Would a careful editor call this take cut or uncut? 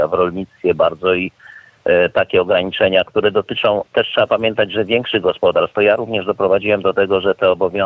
cut